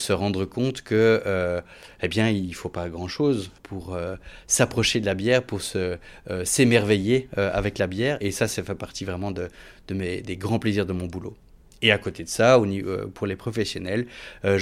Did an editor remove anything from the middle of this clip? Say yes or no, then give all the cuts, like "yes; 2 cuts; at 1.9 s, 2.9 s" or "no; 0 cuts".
no; 0 cuts